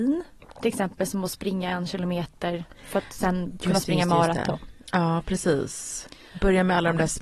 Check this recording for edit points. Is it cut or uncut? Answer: uncut